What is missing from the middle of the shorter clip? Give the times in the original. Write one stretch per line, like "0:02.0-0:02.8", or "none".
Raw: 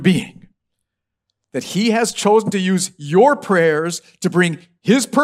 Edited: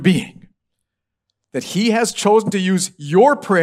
none